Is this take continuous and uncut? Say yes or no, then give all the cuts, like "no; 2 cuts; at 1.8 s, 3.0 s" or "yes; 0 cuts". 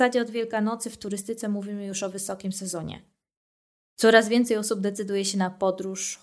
yes; 0 cuts